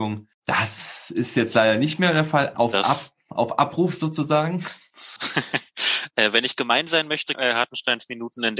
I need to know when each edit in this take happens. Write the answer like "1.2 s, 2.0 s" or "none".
2.5 s, 5.2 s, 7.3 s